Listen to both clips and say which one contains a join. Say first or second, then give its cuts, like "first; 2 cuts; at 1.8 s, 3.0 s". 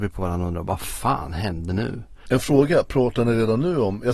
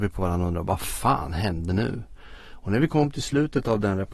first; 1 cut; at 2.3 s